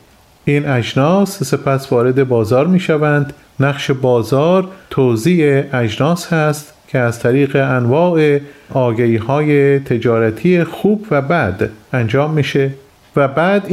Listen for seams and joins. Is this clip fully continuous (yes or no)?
yes